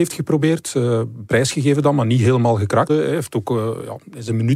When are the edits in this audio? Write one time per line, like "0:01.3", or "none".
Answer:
0:01.3
0:02.9